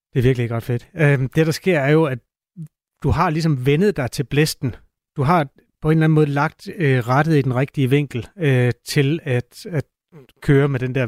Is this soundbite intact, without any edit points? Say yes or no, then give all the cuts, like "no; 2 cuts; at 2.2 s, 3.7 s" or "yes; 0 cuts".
yes; 0 cuts